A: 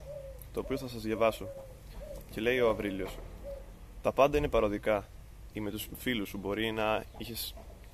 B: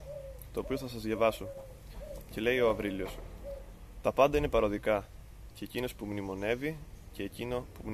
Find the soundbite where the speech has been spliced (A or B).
A